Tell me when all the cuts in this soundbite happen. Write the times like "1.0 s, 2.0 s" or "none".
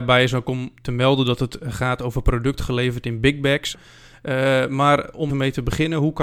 3.7 s, 5.3 s

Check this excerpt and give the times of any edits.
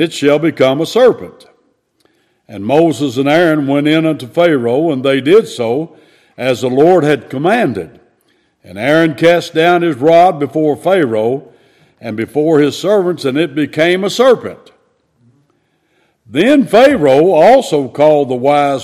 none

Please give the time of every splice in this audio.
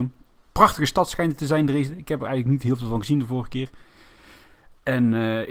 none

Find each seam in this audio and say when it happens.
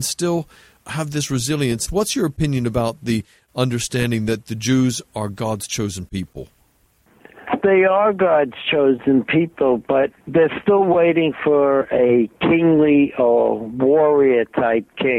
1.9 s

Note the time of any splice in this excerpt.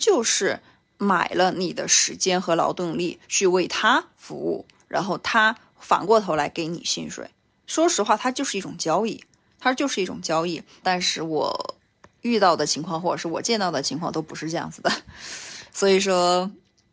10.8 s

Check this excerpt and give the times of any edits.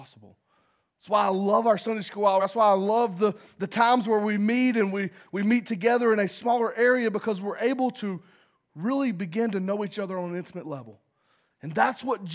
none

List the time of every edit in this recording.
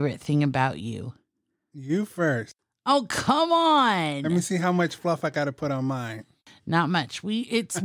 none

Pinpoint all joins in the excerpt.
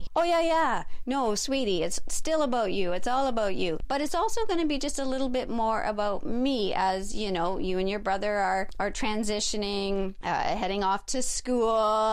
none

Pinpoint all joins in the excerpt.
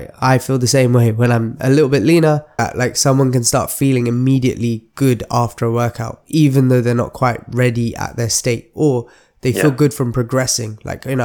2.6 s

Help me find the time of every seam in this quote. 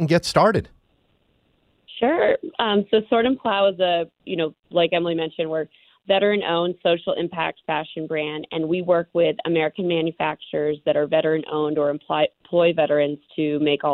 none

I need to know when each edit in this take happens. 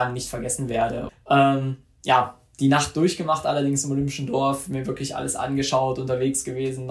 1.1 s

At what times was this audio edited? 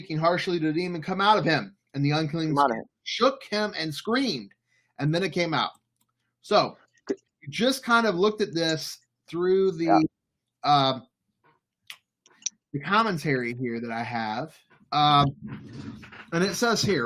none

